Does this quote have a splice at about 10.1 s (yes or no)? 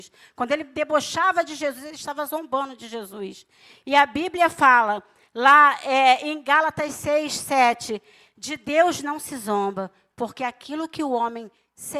yes